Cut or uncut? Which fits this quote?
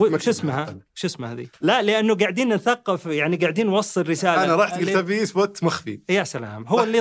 cut